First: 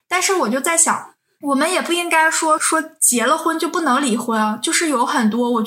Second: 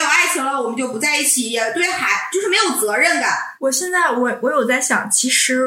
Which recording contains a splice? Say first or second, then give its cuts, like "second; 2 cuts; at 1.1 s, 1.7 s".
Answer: first; 1 cut; at 2.6 s